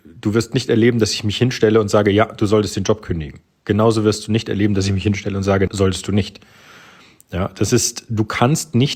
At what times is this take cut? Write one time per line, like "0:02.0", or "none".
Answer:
0:05.7